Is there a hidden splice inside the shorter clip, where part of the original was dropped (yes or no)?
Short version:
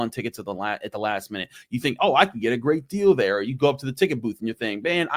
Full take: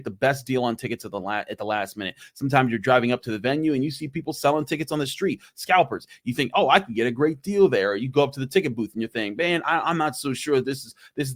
yes